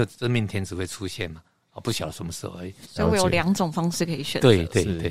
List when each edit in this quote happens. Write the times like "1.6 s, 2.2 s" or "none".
2.8 s